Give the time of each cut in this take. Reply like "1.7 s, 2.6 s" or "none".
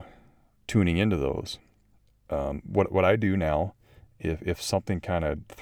none